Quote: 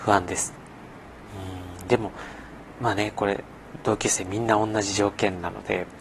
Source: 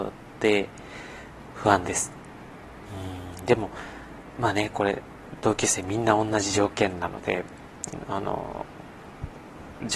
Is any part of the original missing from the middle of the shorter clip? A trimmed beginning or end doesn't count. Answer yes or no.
no